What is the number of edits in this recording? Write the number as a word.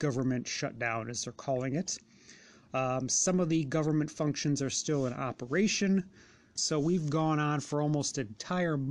one